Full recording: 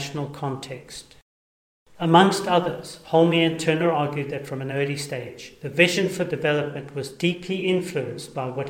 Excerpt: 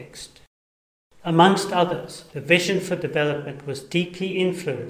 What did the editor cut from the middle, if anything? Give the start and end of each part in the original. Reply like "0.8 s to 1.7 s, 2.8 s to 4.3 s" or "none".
3.0 s to 5.6 s